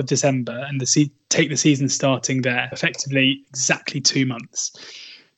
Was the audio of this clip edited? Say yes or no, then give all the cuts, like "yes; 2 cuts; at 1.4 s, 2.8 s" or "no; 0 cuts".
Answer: yes; 1 cut; at 2.7 s